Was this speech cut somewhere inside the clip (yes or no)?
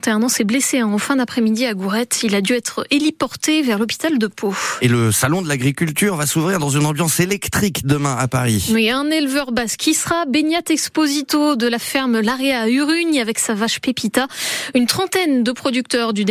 no